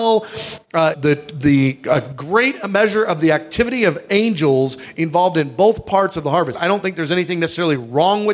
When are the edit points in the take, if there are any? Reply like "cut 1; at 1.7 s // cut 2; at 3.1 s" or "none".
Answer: cut 1; at 0.9 s // cut 2; at 6.5 s